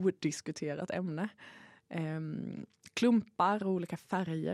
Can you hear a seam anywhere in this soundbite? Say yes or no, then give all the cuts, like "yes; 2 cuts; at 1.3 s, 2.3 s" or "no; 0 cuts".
no; 0 cuts